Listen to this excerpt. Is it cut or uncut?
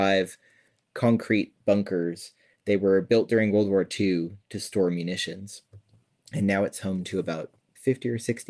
uncut